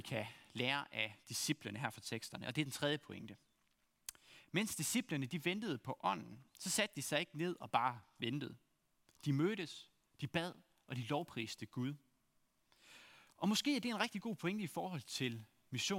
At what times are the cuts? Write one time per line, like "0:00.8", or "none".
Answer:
none